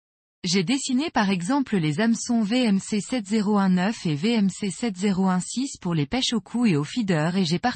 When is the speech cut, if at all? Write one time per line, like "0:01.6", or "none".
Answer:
none